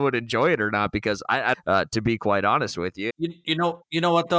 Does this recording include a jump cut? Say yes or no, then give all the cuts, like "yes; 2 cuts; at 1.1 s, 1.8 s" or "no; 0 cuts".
yes; 2 cuts; at 1.5 s, 3.1 s